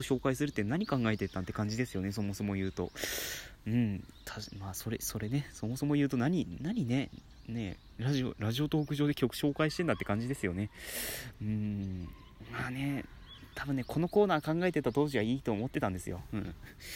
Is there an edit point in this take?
no; 0 cuts

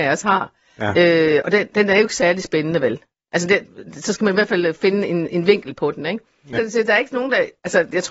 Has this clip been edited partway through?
yes; 1 cut; at 6.5 s

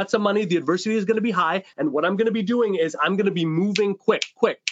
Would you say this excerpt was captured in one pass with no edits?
yes; 0 cuts

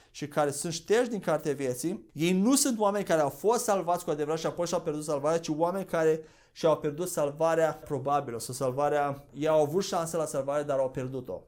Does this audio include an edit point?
no; 0 cuts

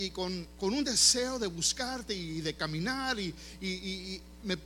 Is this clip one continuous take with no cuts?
yes; 0 cuts

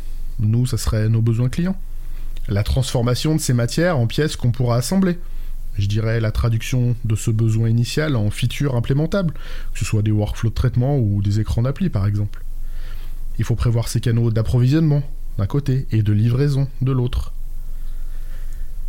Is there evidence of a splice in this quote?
yes; 1 cut; at 13.3 s

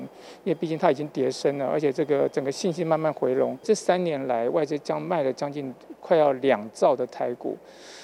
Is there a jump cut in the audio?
no; 0 cuts

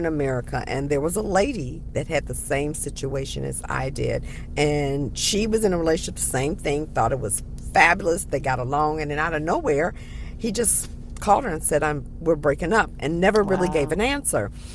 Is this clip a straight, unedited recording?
yes; 0 cuts

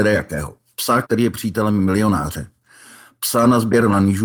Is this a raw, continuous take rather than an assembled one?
no; 1 cut; at 1.0 s

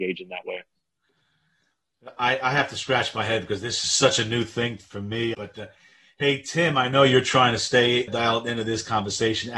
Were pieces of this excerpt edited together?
yes; 2 cuts; at 5.3 s, 8.1 s

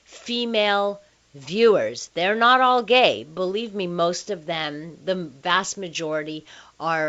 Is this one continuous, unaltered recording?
yes; 0 cuts

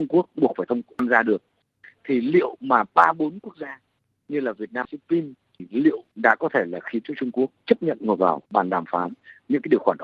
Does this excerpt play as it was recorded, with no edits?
no; 2 cuts; at 4.8 s, 8.5 s

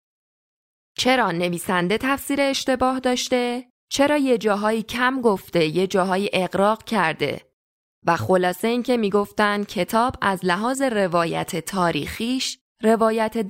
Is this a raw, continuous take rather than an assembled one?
no; 1 cut; at 3.8 s

